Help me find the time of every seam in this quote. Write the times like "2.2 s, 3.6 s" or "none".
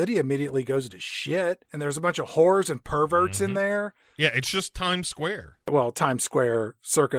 1.6 s